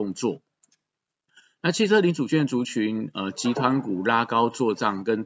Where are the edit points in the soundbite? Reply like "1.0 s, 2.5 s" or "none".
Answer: none